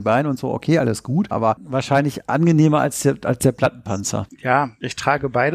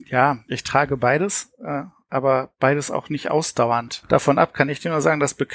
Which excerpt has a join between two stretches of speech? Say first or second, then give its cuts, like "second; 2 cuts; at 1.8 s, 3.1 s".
first; 1 cut; at 1.3 s